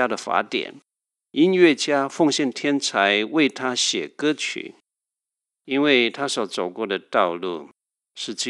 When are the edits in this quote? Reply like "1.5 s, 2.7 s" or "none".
5.6 s